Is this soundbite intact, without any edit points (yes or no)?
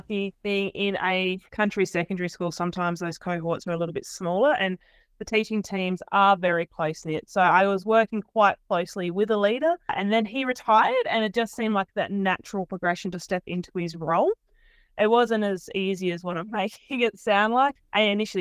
yes